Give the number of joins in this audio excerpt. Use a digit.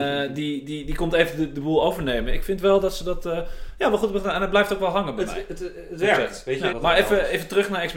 1